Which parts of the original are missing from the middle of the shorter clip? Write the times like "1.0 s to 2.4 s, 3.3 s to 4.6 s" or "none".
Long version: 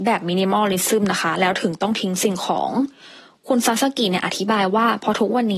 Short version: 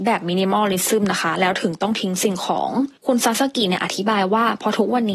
3.0 s to 3.4 s